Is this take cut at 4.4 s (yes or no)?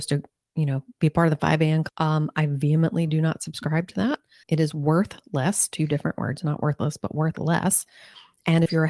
yes